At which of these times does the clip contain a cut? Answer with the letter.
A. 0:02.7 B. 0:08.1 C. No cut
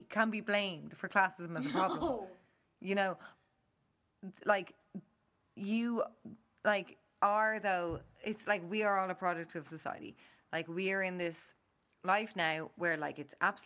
C